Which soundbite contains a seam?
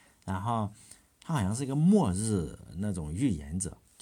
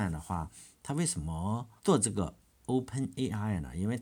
second; 1 cut; at 1.8 s

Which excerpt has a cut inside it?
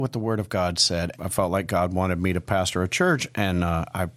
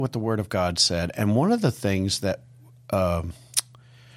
first; 1 cut; at 1.1 s

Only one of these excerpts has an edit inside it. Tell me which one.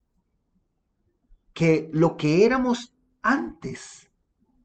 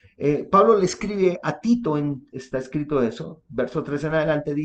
second; 1 cut; at 2.3 s

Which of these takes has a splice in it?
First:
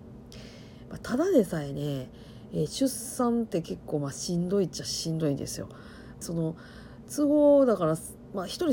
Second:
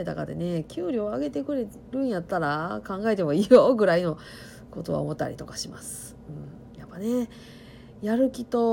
first; 1 cut; at 6.2 s

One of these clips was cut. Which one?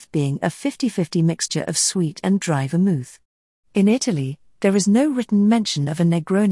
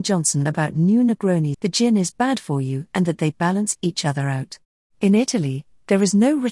second; 2 cuts; at 1.5 s, 4.9 s

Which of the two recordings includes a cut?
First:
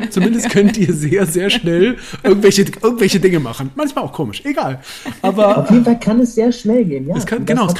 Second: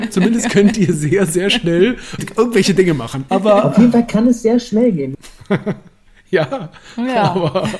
second; 3 cuts; at 2.2 s, 3.3 s, 5.1 s

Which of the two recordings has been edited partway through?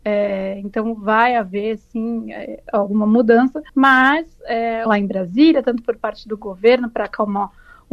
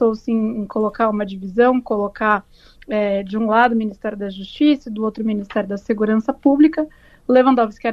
first; 2 cuts; at 3.7 s, 4.9 s

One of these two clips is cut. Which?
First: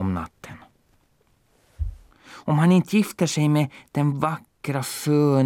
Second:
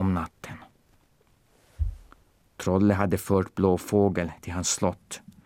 first; 1 cut; at 2.1 s

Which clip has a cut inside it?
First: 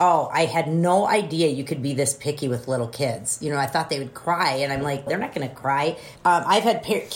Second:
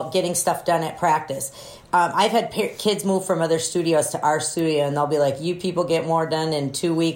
first; 2 cuts; at 5.1 s, 6.2 s

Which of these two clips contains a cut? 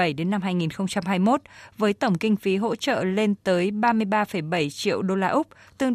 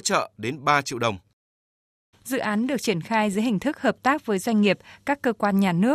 second; 1 cut; at 2.1 s

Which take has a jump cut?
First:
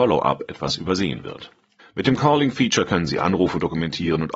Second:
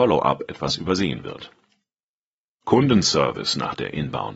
first; 1 cut; at 1.8 s

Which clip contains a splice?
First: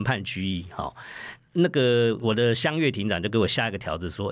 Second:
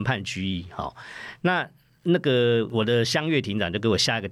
first; 1 cut; at 1.4 s

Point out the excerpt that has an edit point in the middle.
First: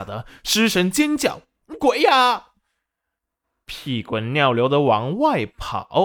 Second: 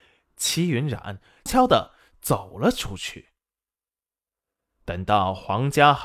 second; 1 cut; at 1.5 s

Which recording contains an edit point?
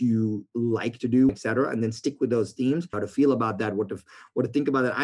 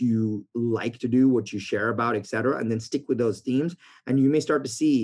first; 2 cuts; at 1.3 s, 2.9 s

